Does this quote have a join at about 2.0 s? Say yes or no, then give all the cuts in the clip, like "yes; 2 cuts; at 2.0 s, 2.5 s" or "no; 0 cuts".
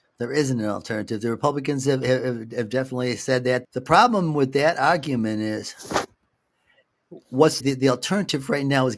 no; 2 cuts; at 3.6 s, 7.6 s